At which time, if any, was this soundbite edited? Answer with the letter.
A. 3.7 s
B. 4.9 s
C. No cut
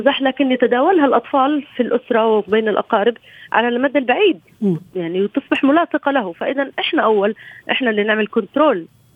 C